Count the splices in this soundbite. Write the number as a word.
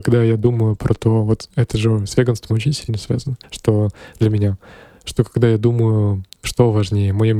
zero